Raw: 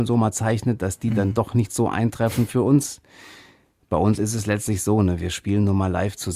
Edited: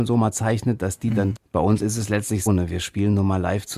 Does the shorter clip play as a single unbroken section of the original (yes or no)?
no